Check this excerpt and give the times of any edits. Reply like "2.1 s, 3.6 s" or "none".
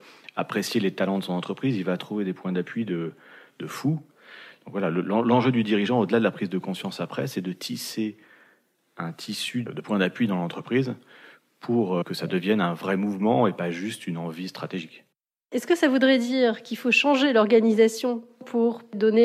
none